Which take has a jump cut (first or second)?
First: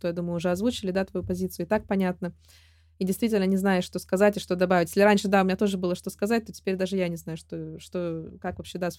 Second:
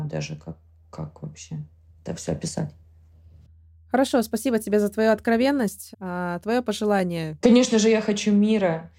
second